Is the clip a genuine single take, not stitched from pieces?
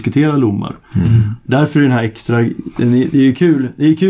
yes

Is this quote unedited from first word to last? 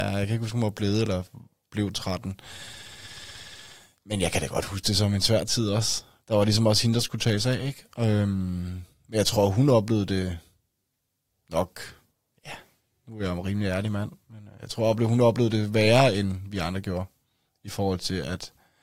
yes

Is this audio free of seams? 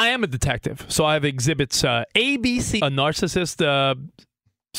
no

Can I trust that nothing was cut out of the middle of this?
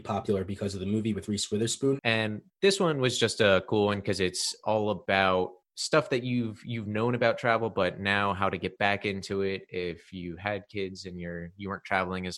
no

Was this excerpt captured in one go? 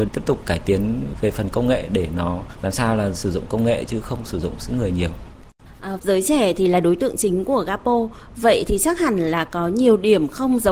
no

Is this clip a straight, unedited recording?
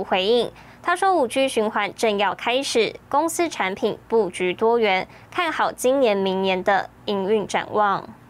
yes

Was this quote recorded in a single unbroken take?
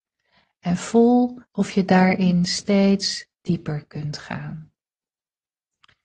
no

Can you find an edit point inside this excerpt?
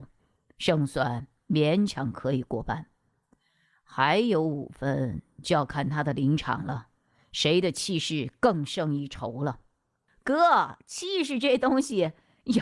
no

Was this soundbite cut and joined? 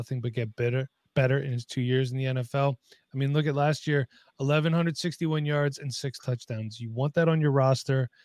no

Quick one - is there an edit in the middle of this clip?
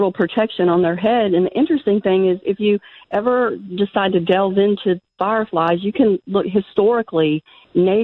no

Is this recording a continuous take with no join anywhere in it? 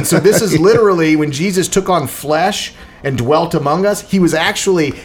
yes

